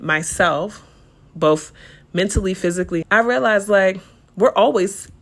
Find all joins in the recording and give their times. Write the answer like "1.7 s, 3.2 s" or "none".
3.0 s